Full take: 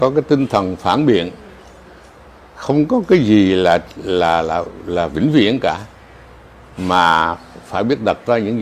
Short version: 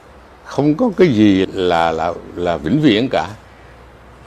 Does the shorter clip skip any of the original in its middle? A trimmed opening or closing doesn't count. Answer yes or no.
yes